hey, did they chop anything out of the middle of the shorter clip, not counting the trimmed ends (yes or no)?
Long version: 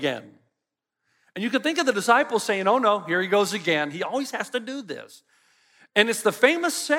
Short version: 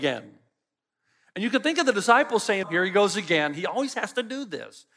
yes